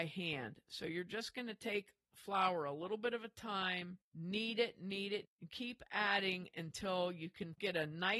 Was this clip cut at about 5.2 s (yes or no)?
yes